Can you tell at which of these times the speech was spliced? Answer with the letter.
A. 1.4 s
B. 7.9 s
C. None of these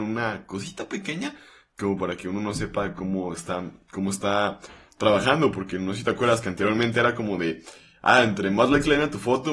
C